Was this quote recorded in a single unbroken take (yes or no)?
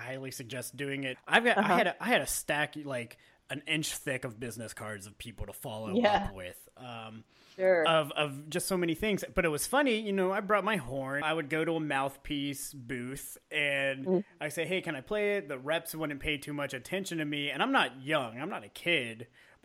no